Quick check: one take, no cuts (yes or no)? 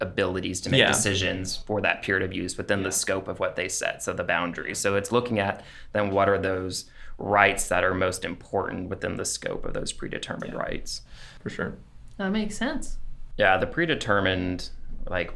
no